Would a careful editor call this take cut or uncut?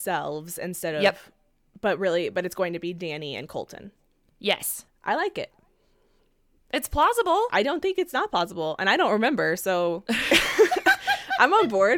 cut